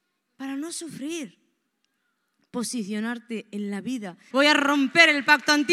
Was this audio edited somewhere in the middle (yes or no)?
yes